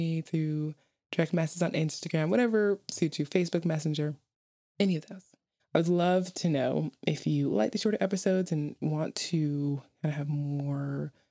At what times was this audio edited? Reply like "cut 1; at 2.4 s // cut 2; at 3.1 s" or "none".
cut 1; at 5.6 s